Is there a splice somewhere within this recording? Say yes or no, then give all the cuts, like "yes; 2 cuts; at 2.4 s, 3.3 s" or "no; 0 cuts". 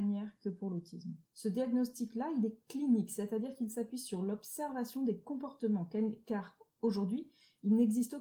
yes; 1 cut; at 1.3 s